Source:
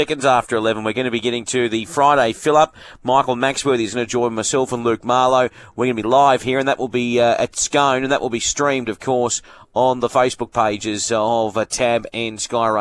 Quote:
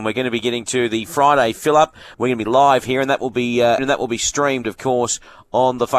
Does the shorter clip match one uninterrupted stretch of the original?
no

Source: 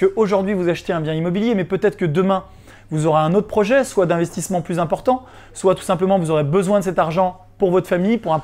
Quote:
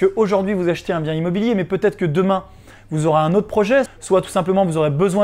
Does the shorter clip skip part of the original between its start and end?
yes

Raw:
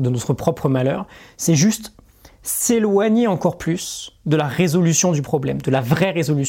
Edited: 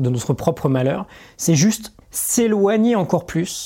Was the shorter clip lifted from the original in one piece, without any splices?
no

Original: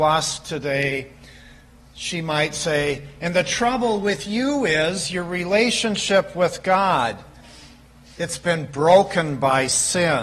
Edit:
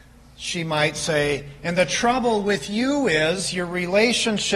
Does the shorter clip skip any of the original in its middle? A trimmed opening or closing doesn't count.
no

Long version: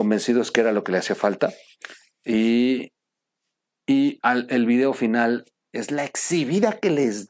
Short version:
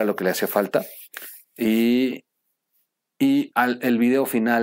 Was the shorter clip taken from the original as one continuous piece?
yes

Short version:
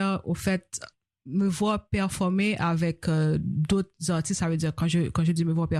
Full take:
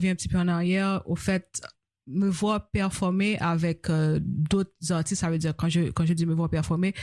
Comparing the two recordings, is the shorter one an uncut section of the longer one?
yes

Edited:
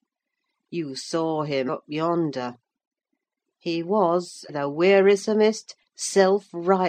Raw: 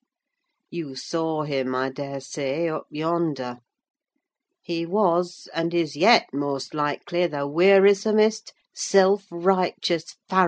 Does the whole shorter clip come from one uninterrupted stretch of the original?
no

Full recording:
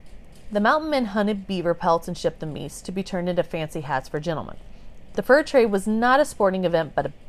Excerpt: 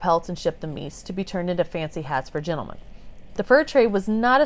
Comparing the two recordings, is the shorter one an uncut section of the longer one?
yes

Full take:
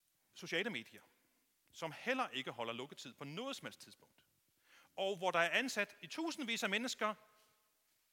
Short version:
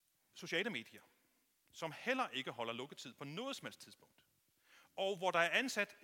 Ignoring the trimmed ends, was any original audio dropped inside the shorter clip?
no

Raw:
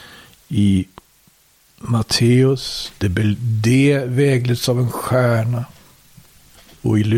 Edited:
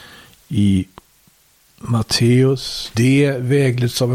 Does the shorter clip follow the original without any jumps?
no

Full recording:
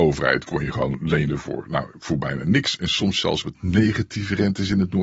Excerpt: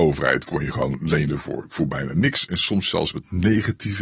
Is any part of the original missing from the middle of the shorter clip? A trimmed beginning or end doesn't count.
yes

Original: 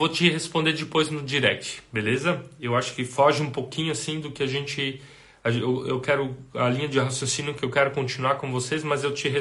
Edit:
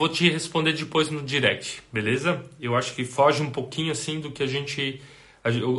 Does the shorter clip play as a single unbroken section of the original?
yes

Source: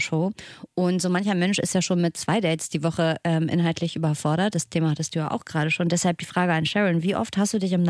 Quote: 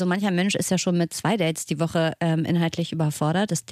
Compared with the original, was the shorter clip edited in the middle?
no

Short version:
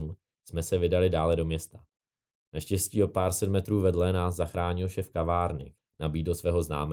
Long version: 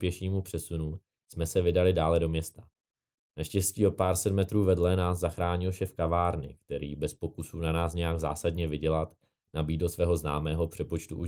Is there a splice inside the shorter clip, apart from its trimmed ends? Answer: yes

